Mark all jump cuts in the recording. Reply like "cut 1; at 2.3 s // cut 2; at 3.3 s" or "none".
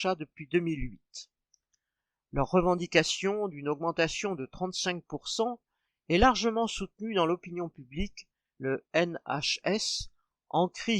cut 1; at 5.9 s // cut 2; at 8.5 s